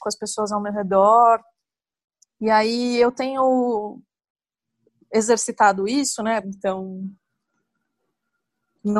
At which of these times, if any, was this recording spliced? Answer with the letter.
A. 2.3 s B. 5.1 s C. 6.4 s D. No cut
C